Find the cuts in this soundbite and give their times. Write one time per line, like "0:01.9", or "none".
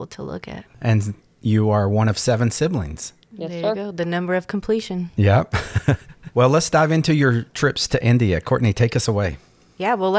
none